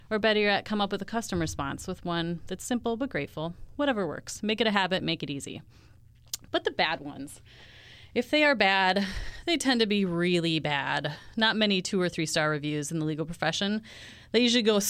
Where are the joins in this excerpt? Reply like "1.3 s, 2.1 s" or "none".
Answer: none